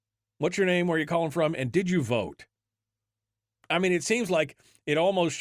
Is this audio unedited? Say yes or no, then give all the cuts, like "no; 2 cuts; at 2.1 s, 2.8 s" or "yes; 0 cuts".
no; 1 cut; at 3.5 s